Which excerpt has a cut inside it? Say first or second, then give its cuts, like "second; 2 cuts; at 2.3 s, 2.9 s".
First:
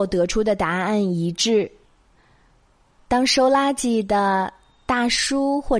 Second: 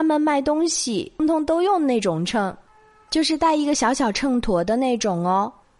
second; 1 cut; at 1.2 s